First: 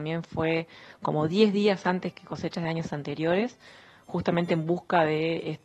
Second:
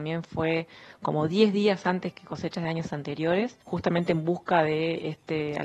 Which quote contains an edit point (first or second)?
second